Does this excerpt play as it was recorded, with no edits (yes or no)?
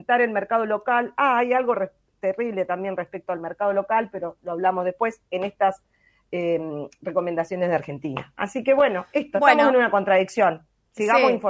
yes